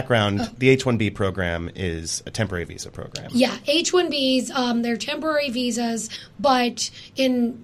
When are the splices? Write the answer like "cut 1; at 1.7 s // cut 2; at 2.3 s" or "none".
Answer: none